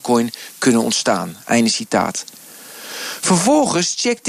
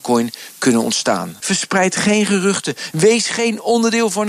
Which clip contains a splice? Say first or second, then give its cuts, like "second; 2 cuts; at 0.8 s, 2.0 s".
second; 2 cuts; at 1.4 s, 2.9 s